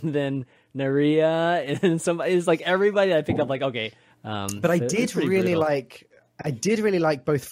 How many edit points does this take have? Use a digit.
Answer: 1